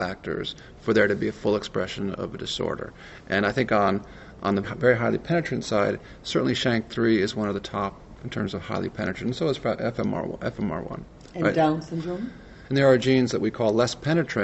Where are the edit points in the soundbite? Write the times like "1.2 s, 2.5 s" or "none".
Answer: 4.6 s, 12.7 s